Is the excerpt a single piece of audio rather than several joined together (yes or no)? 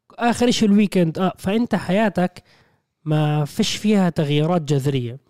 yes